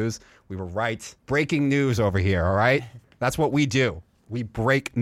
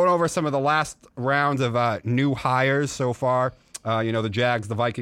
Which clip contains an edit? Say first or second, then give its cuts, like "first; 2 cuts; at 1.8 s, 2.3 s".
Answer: first; 1 cut; at 1.2 s